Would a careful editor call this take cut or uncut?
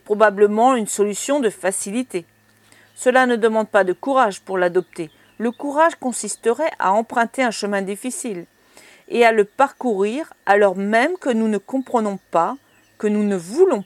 uncut